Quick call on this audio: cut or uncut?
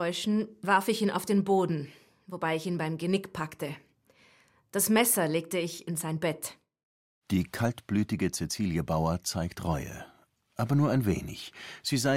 uncut